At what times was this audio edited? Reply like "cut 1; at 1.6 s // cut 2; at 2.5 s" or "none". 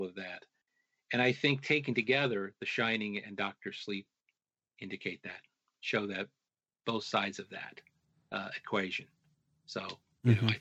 none